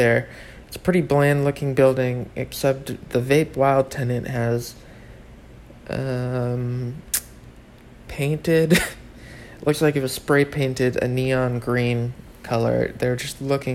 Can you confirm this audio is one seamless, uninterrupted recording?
yes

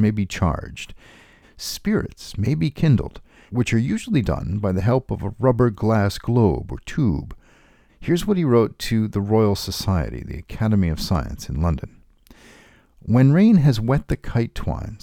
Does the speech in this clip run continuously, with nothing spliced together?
no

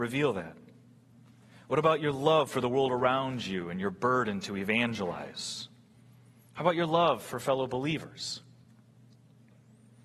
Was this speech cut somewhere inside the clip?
no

